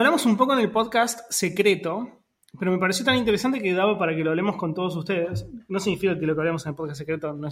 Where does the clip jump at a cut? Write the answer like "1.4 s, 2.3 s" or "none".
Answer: none